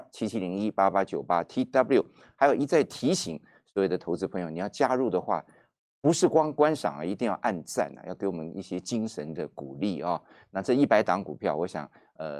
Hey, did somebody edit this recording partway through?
no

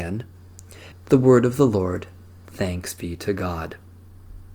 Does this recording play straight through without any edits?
no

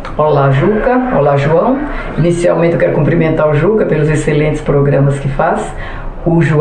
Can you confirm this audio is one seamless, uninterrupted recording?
yes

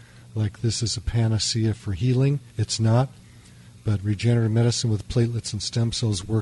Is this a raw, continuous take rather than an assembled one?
no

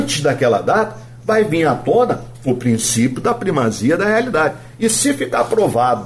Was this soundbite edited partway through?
no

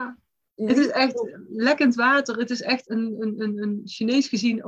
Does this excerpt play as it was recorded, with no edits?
yes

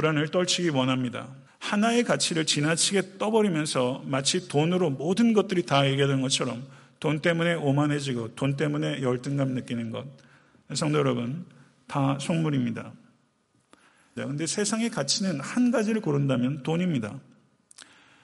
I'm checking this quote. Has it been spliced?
yes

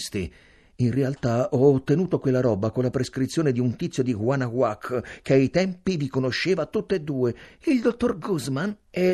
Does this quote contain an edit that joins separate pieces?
no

